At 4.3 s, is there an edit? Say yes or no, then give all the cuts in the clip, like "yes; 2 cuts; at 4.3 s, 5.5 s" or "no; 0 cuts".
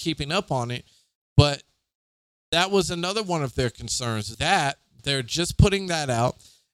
yes; 1 cut; at 4.3 s